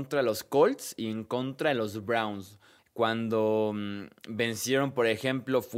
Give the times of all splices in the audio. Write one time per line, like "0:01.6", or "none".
0:02.8

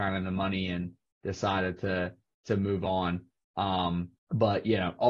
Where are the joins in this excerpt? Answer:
0:04.2

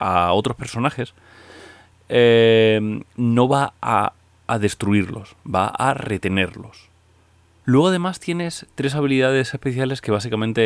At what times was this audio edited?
0:07.6

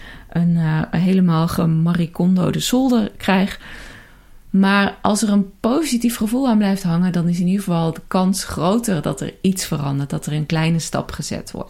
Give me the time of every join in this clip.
none

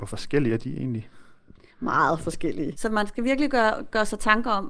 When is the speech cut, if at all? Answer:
0:02.7

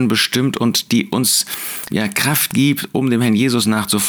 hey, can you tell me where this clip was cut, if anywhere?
0:01.9

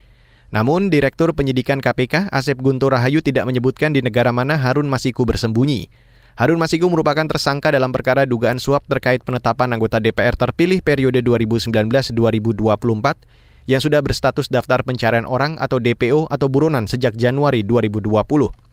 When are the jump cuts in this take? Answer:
none

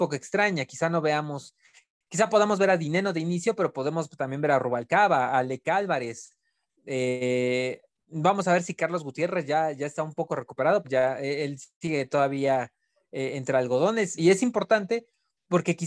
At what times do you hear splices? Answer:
0:10.8
0:14.2

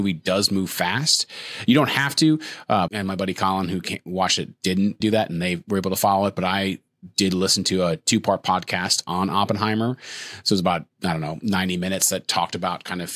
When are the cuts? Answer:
0:02.9
0:05.0
0:10.9

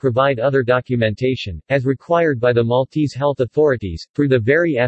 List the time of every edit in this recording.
none

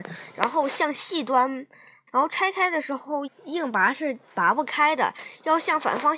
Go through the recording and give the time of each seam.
0:02.1
0:03.3

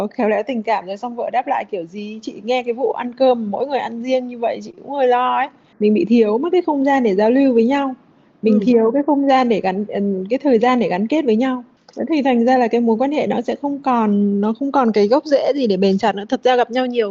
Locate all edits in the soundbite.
none

